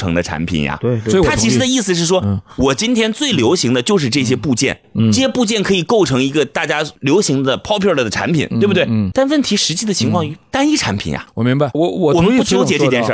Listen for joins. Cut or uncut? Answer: cut